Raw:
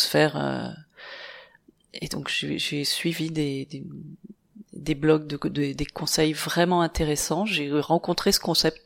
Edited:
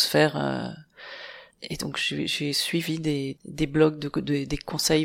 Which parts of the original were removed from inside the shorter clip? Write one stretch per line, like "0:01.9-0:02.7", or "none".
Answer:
0:01.5-0:01.8
0:03.7-0:04.6